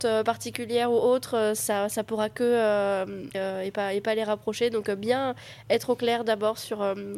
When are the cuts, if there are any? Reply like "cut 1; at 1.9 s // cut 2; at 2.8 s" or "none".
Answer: cut 1; at 3.3 s